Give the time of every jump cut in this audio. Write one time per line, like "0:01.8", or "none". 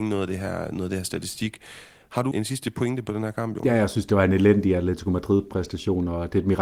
0:02.3